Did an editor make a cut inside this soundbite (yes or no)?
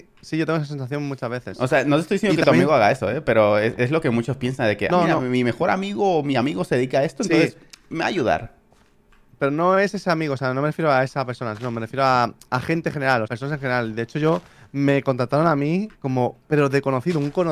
yes